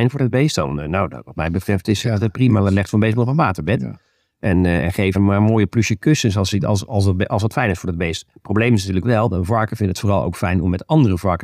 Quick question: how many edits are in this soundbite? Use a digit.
1